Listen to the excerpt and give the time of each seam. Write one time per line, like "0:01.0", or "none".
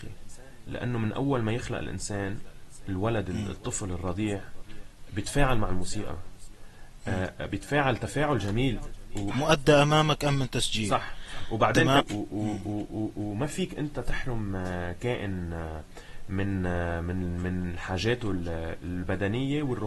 0:09.3
0:12.0